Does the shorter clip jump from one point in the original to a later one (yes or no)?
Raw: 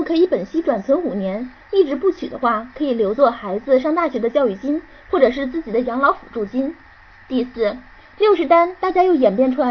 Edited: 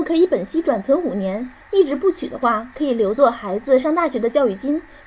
no